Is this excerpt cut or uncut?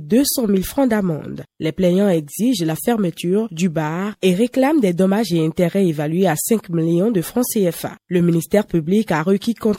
cut